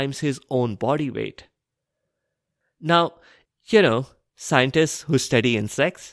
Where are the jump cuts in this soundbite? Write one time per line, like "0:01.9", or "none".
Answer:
0:03.5